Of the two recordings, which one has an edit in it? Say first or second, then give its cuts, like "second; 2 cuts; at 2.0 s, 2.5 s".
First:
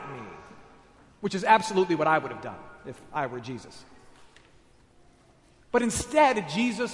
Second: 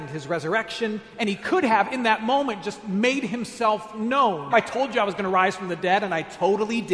second; 1 cut; at 4.5 s